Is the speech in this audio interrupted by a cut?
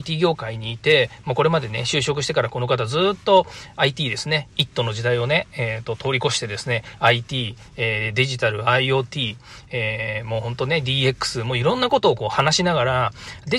no; 0 cuts

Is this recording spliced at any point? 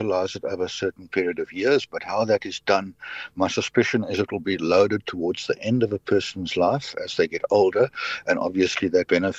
no; 0 cuts

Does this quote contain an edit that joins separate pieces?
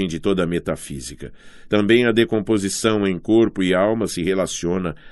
yes; 1 cut; at 1.7 s

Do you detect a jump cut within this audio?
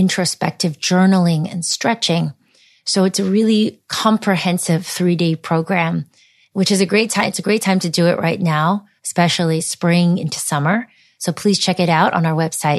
no; 0 cuts

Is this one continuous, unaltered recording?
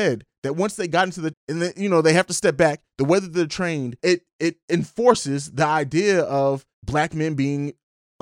no; 3 cuts; at 1.3 s, 4.0 s, 6.7 s

